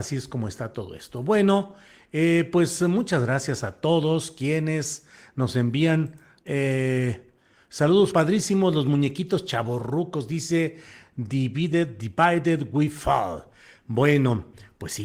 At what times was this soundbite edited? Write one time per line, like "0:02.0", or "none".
0:06.4
0:08.1